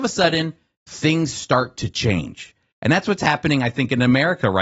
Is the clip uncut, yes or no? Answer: no